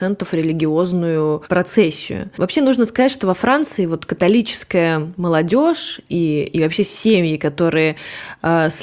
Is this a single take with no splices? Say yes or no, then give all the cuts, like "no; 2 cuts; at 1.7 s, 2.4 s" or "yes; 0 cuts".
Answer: yes; 0 cuts